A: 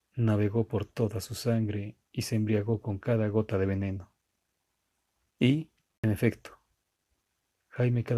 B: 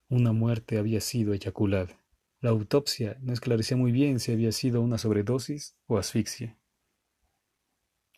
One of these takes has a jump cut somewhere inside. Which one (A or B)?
B